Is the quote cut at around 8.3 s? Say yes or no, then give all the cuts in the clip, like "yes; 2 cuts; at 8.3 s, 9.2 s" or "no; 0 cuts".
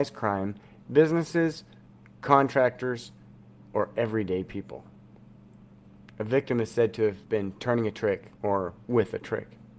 yes; 2 cuts; at 6.0 s, 8.3 s